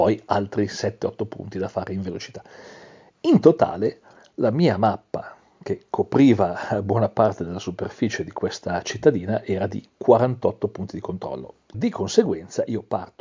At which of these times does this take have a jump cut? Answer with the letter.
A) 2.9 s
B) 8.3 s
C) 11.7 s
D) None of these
C